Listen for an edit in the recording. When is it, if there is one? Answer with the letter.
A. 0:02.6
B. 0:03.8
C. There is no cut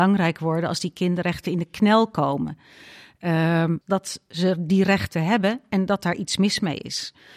B